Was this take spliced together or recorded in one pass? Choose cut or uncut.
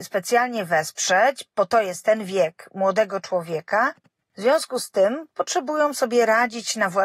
uncut